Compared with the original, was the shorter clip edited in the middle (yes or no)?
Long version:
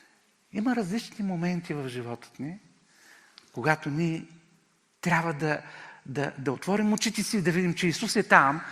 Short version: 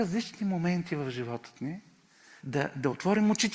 yes